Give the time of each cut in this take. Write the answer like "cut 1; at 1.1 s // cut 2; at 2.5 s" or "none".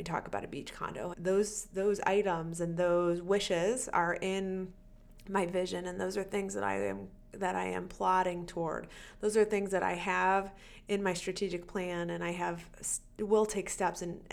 cut 1; at 1.1 s